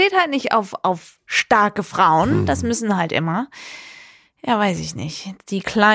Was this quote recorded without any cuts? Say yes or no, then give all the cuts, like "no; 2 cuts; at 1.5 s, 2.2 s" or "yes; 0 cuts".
yes; 0 cuts